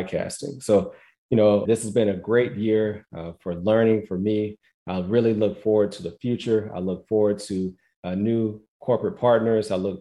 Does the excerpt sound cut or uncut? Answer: cut